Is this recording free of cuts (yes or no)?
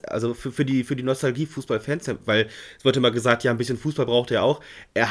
yes